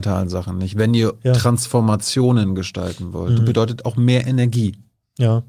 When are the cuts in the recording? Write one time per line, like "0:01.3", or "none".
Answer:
0:03.4